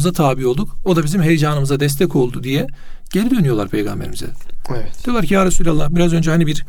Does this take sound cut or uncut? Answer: uncut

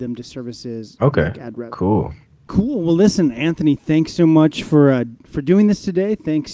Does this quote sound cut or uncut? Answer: cut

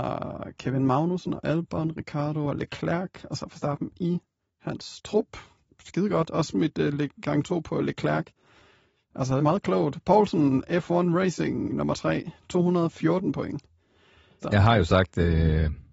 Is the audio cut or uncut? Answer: cut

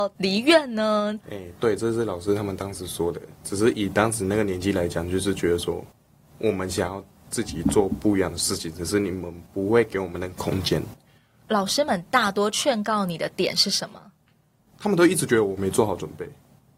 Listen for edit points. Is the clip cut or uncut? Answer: cut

